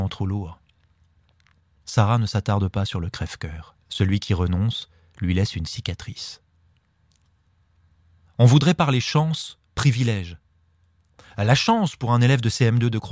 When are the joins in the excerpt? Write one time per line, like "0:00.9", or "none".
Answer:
0:03.8